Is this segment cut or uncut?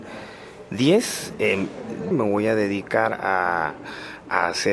cut